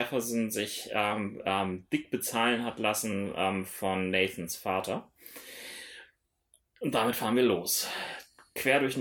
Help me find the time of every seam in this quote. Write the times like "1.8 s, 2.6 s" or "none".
none

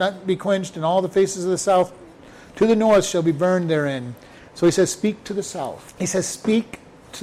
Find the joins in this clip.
4.4 s

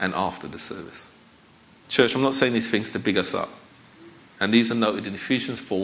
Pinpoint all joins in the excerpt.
1.8 s, 4.3 s

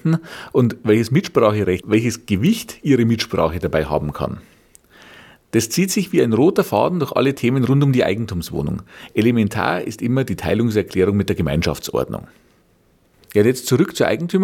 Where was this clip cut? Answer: 1.8 s

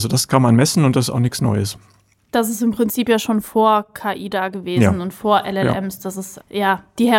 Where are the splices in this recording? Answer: none

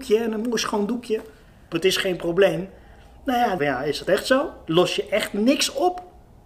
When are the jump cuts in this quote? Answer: 1.7 s, 3.6 s

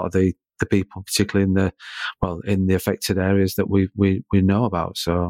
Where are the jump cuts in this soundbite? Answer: none

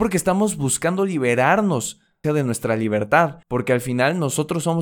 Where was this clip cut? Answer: 2.2 s, 3.4 s

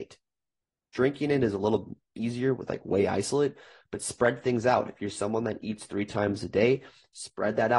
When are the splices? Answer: none

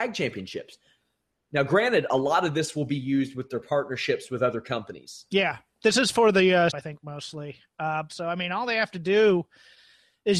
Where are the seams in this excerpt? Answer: 6.7 s, 8.1 s

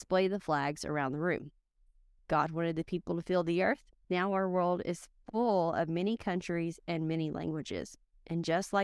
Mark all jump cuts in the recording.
2.2 s, 4.0 s

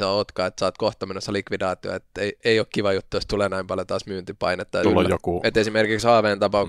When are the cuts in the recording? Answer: 2.4 s, 4.8 s

